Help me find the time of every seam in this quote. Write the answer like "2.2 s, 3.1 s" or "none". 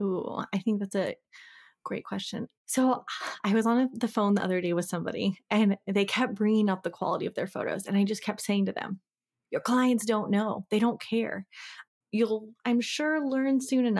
none